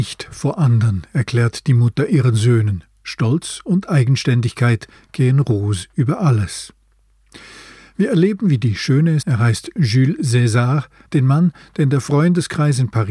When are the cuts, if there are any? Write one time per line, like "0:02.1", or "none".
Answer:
0:09.2
0:11.0